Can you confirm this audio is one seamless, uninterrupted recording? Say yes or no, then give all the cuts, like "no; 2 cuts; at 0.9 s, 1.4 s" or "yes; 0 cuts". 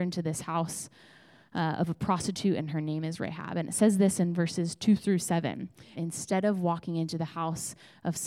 no; 1 cut; at 6.0 s